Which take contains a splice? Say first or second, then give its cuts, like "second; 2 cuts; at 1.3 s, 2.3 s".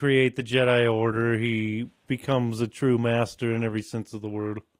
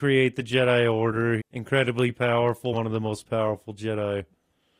second; 2 cuts; at 1.4 s, 2.7 s